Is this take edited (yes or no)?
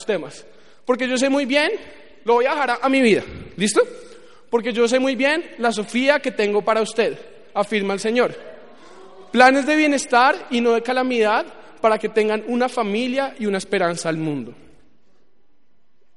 no